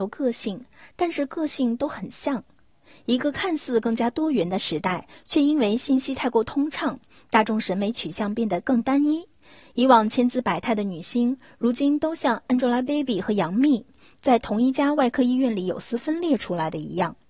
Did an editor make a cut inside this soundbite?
no; 0 cuts

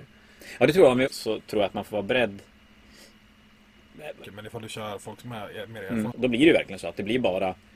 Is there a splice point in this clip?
yes; 3 cuts; at 1.1 s, 4.2 s, 6.1 s

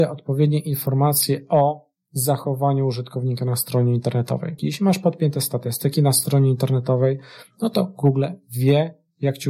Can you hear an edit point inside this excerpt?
yes; 1 cut; at 4.6 s

